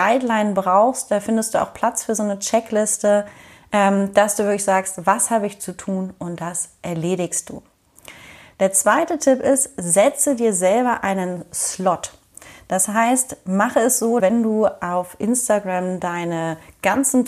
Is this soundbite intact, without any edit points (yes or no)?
no